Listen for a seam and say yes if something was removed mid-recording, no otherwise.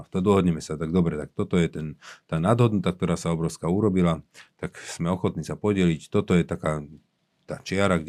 no